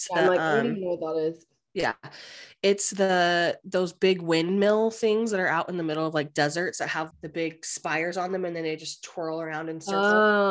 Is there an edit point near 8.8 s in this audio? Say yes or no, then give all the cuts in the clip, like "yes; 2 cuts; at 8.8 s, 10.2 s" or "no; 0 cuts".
no; 1 cut; at 7.1 s